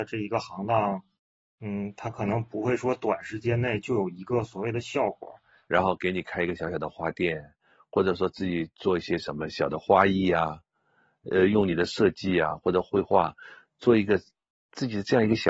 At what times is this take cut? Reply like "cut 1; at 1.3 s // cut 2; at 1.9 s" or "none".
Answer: cut 1; at 5.7 s